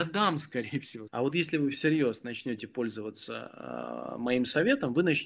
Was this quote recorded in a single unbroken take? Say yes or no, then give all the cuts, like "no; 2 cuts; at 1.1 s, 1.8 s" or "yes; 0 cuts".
no; 1 cut; at 1.1 s